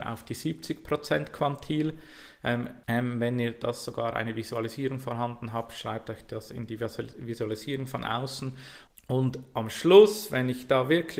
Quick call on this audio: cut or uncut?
cut